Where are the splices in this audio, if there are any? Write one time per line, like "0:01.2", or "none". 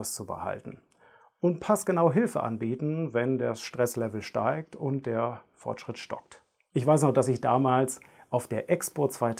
none